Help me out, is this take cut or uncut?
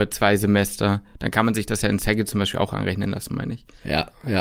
uncut